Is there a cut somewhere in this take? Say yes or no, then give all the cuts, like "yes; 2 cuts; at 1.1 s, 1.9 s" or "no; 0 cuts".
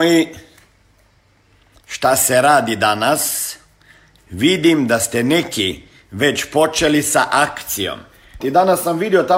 yes; 2 cuts; at 4.2 s, 8.4 s